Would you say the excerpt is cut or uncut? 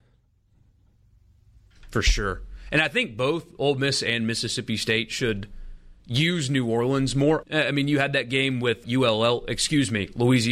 cut